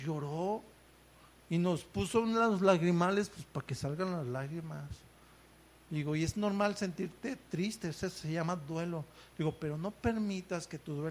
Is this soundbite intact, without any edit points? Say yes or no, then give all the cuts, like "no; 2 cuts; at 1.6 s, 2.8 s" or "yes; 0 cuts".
yes; 0 cuts